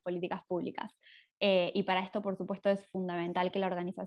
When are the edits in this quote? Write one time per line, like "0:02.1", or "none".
none